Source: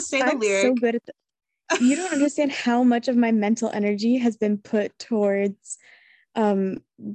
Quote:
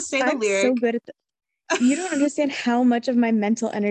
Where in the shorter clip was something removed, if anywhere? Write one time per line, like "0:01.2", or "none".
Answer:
none

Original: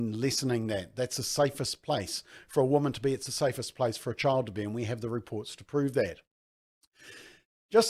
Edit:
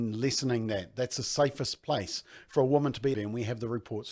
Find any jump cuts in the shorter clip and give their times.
0:03.1

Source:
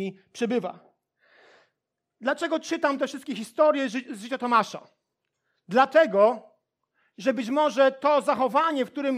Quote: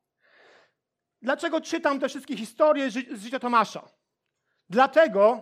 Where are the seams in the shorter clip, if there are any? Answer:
none

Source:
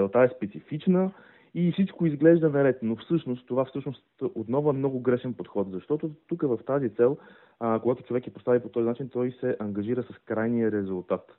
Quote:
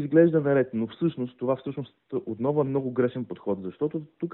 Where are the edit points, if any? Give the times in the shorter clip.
none

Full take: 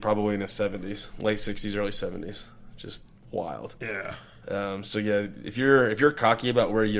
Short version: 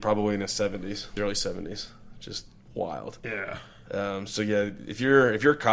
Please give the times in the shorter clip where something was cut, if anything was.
0:01.2

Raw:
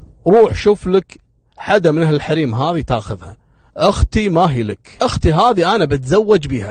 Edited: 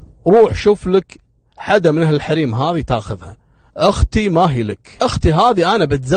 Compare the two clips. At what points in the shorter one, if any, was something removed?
none

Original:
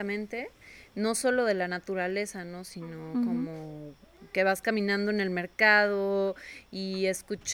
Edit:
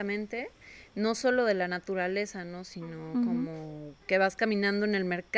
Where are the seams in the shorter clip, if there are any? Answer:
0:04.0

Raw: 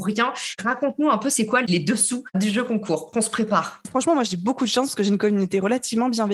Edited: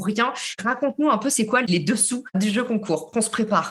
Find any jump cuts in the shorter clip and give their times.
none

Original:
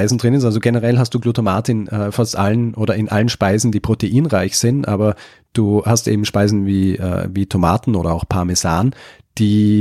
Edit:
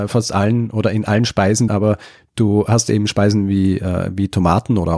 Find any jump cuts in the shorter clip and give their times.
0:01.7

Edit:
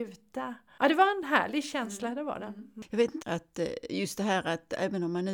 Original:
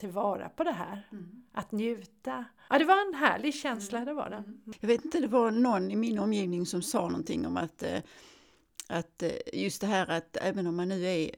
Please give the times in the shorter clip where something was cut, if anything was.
0:03.2

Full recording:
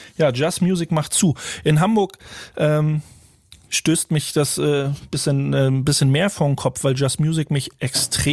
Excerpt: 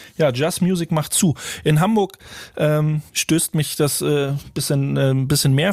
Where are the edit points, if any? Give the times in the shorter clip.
0:03.1

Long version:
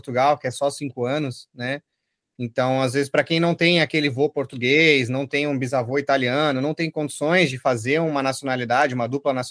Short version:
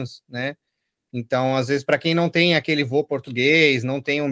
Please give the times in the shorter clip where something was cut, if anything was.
none

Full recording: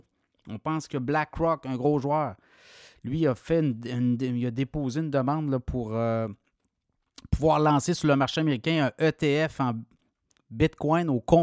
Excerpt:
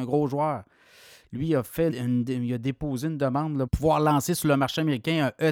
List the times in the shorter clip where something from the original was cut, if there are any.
0:01.9
0:03.7

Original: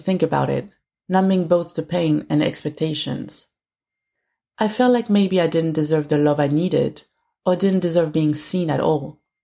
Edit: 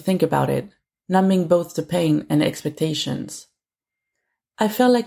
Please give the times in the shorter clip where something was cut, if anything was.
none

